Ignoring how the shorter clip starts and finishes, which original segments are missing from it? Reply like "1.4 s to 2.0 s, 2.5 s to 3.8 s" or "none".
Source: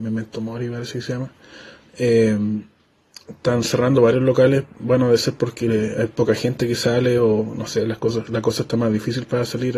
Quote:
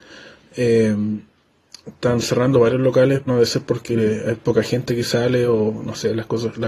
4.7 s to 5.0 s